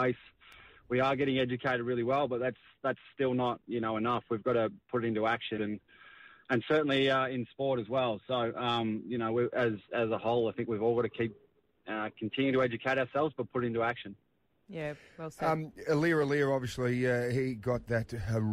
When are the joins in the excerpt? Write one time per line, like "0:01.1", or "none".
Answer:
0:05.6

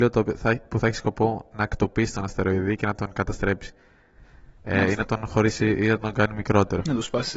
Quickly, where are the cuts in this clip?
none

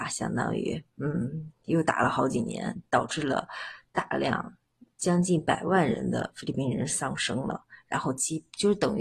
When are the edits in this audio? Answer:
none

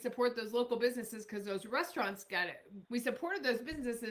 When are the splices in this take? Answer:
0:02.8

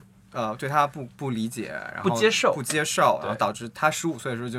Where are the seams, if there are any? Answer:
0:01.1

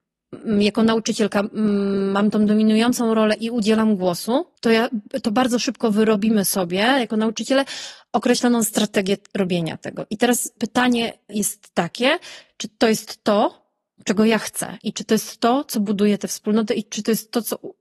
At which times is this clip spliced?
0:04.5

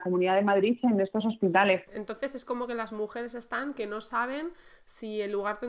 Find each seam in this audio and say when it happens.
0:01.9

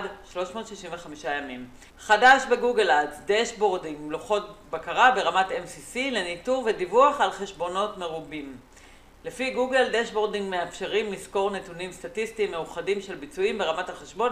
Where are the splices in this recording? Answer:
0:01.9

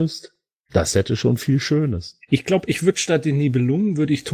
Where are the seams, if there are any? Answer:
none

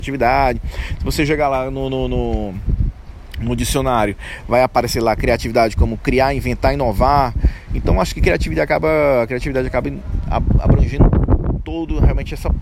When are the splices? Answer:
none

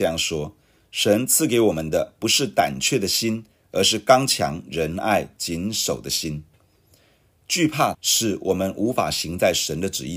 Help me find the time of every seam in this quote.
0:07.9

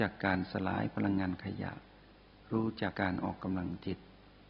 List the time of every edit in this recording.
0:02.9

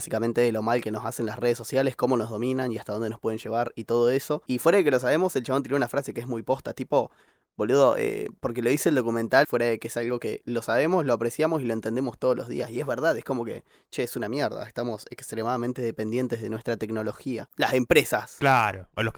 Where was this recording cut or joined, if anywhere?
0:09.4
0:17.5

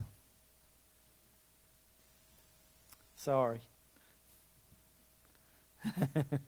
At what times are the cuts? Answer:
none

